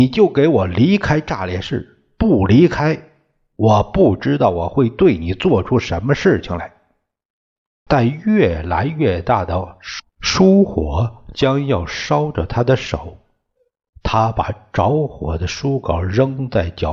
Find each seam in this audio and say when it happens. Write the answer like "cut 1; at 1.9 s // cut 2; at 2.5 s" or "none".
cut 1; at 7.9 s // cut 2; at 10.1 s

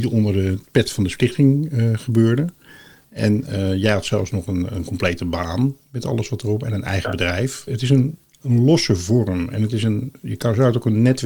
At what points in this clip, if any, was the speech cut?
cut 1; at 3.0 s // cut 2; at 7.7 s

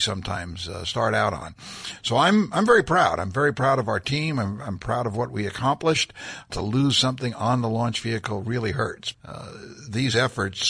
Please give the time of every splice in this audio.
cut 1; at 6.5 s // cut 2; at 9.1 s

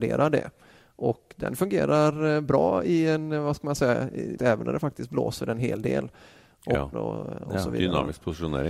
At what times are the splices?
cut 1; at 4.4 s // cut 2; at 6.9 s

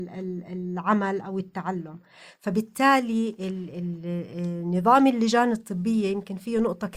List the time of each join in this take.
none

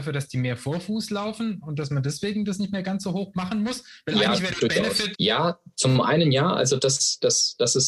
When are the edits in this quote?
cut 1; at 5.1 s

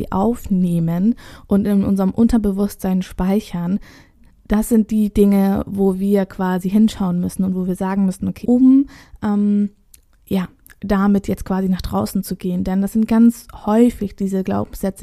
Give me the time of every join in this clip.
cut 1; at 8.4 s

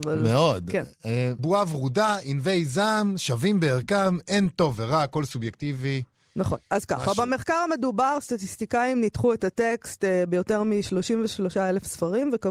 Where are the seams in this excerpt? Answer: cut 1; at 1.4 s

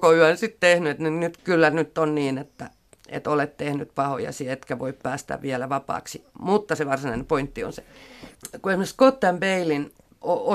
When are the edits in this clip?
cut 1; at 1.4 s

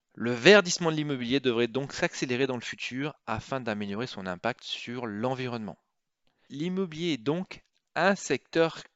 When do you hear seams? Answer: cut 1; at 6.5 s

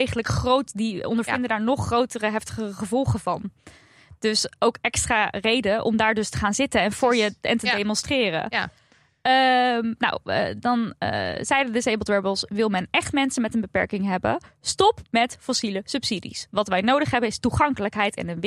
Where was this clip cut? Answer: none

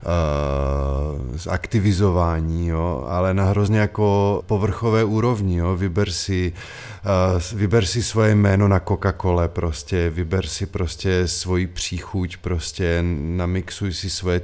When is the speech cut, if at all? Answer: cut 1; at 4.4 s

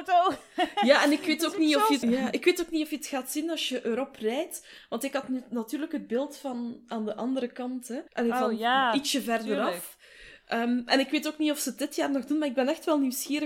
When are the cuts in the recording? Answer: cut 1; at 2.0 s // cut 2; at 8.1 s

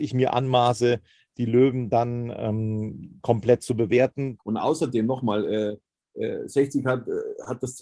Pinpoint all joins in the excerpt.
cut 1; at 4.4 s

